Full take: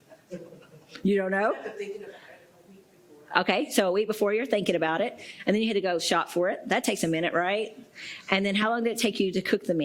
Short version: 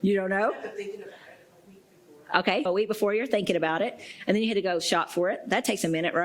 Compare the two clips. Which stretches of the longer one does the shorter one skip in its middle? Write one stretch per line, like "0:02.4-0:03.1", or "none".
0:03.7-0:03.8